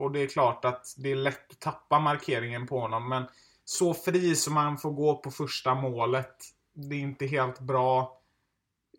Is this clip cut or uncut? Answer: uncut